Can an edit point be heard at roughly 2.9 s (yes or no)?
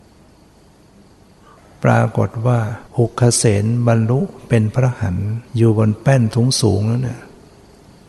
yes